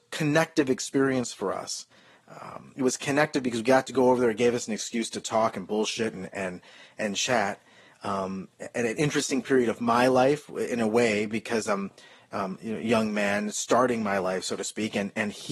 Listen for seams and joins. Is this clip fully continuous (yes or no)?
yes